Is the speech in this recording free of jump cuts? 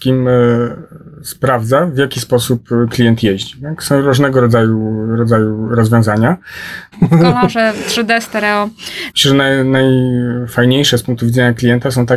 no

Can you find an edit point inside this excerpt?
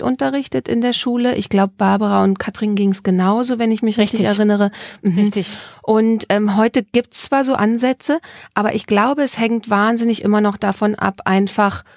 no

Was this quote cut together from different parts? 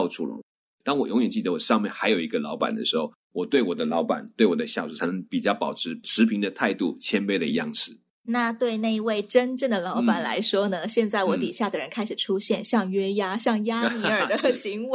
no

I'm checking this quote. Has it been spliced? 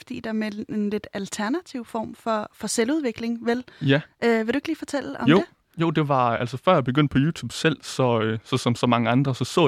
no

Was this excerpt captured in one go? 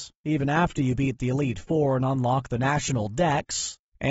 yes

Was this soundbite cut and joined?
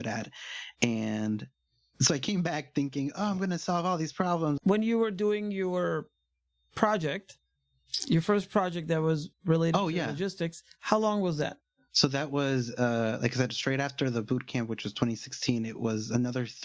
yes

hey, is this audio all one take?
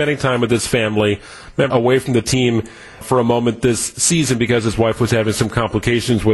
no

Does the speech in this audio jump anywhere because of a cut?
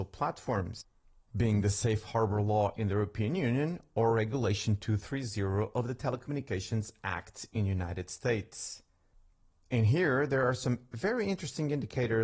no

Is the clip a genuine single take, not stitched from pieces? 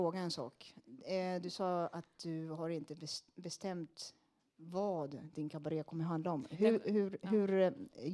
yes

